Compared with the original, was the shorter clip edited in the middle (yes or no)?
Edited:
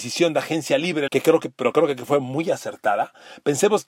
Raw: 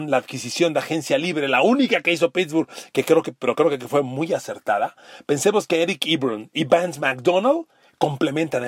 yes